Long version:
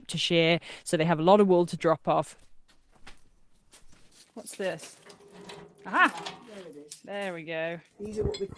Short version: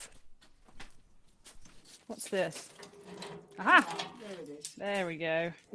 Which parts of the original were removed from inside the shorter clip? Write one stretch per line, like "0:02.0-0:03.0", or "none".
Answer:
none